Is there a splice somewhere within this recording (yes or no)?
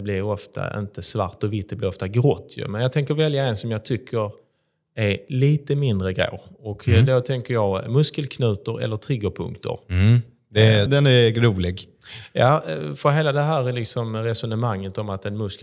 yes